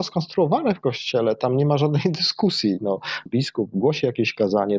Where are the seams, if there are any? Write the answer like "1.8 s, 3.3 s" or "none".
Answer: 3.3 s